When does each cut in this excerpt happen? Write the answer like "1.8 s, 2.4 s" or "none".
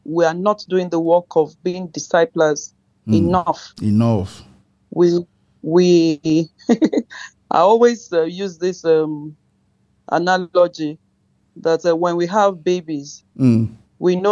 none